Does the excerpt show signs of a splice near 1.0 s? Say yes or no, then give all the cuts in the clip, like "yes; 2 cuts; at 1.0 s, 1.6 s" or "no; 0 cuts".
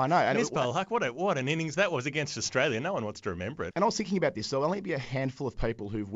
no; 1 cut; at 3.7 s